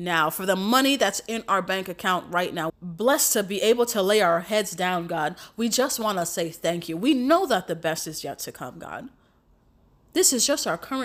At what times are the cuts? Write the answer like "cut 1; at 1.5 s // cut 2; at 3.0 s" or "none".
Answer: cut 1; at 2.7 s